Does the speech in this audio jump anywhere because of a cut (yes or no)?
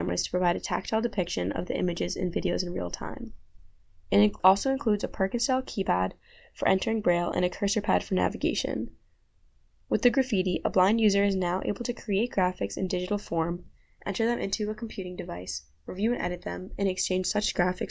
no